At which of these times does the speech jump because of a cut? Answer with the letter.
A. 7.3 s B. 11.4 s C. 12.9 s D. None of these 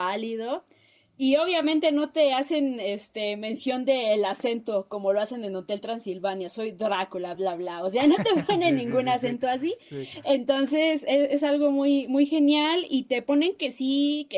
A